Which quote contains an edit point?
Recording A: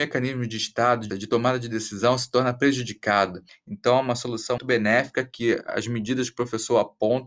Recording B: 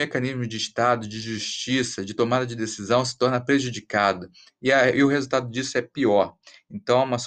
A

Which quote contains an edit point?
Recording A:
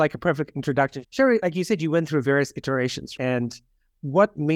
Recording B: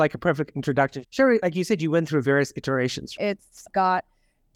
B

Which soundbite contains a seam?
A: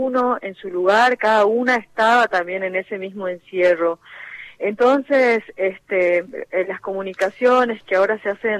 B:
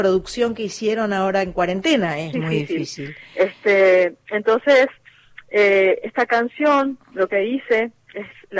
B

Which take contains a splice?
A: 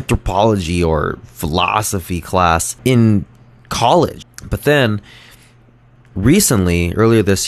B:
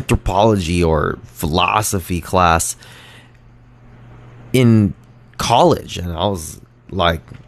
A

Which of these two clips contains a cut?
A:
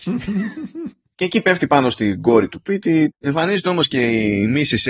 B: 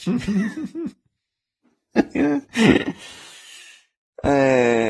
A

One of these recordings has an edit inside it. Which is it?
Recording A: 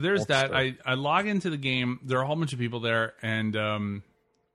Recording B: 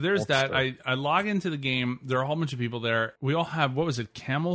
B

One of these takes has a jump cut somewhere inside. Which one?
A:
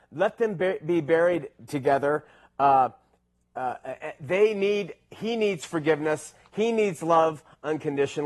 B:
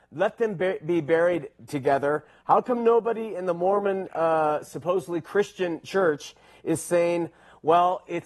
B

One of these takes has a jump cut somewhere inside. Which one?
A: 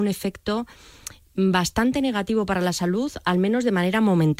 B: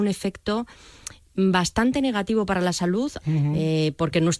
B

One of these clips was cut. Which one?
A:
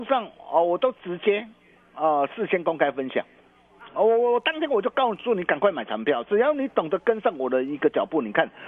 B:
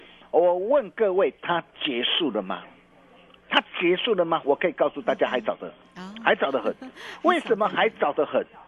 B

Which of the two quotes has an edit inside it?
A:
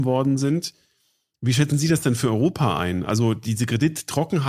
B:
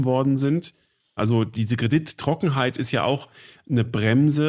B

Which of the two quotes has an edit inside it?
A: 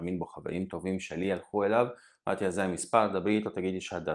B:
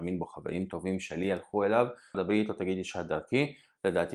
B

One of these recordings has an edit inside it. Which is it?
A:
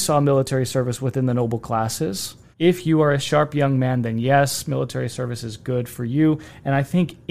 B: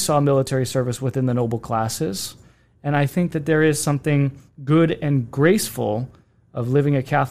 A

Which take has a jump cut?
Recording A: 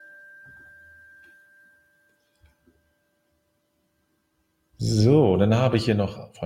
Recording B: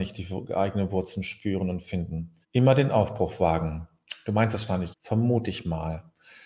B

